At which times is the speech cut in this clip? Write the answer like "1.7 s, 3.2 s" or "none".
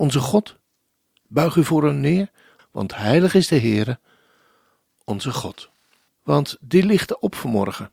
2.6 s, 6.1 s